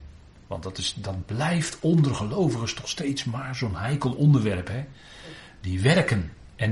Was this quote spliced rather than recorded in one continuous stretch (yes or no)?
no